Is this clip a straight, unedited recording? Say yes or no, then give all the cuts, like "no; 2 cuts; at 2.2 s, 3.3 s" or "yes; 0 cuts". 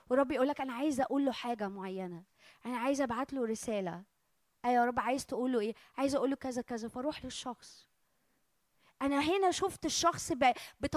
yes; 0 cuts